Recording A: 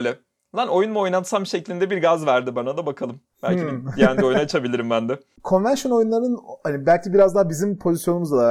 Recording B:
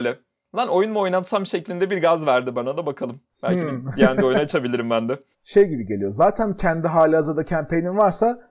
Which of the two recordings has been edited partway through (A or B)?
B